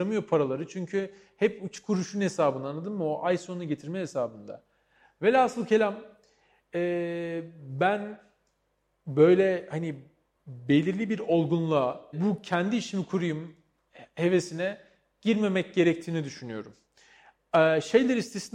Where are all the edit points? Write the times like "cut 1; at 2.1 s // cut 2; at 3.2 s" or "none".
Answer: cut 1; at 12.1 s

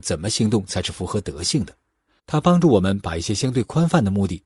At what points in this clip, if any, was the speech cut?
cut 1; at 2.2 s

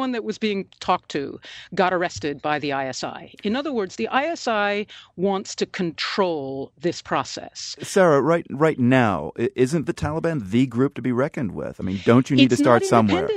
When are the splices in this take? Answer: none

